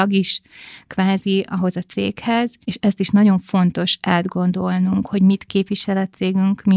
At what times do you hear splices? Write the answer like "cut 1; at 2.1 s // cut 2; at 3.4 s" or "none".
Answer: cut 1; at 2.6 s

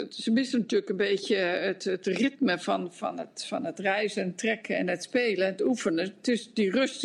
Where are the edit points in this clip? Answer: none

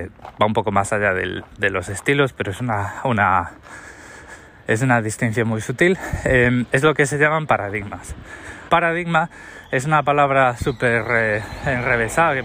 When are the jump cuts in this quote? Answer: cut 1; at 8.7 s

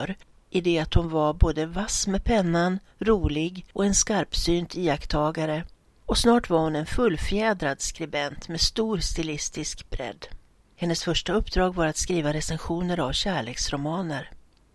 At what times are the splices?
cut 1; at 10.6 s

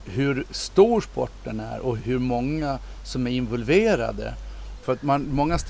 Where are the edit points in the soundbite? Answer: cut 1; at 2.0 s // cut 2; at 4.8 s

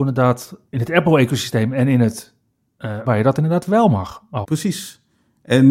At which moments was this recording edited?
cut 1; at 3.1 s // cut 2; at 4.4 s

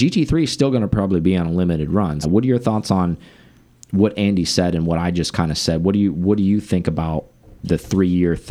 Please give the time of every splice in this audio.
cut 1; at 2.2 s

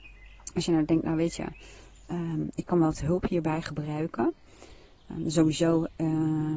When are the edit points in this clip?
none

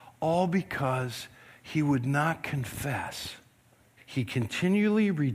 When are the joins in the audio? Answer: cut 1; at 4.0 s

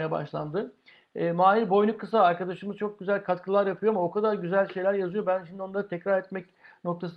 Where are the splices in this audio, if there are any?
none

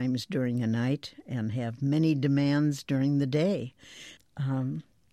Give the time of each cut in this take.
cut 1; at 4.2 s

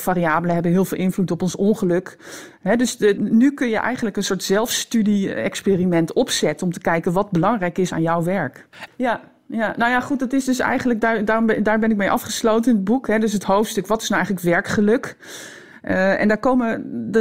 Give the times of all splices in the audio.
cut 1; at 3.2 s // cut 2; at 8.9 s

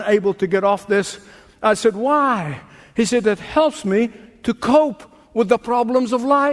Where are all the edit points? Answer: none

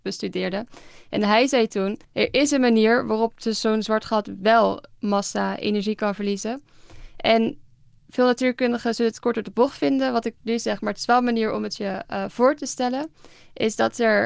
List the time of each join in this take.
cut 1; at 2.0 s

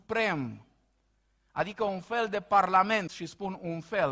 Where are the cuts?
cut 1; at 3.1 s

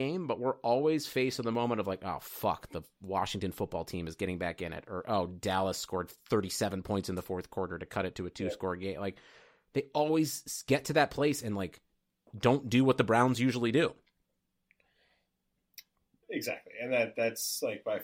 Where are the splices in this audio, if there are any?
none

